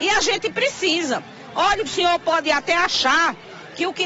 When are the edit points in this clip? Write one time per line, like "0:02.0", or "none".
0:01.8